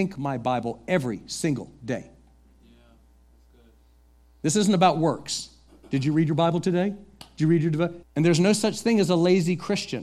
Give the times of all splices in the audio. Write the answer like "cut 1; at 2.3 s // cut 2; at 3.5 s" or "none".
cut 1; at 8.0 s